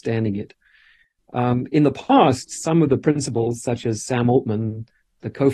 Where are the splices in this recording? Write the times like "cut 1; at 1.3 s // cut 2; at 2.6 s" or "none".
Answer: cut 1; at 1.2 s